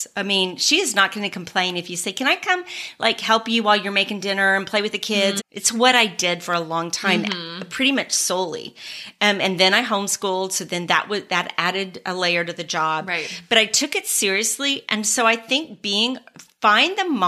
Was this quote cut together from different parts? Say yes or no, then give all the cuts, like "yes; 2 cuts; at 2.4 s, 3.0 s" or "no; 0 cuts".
yes; 1 cut; at 5.4 s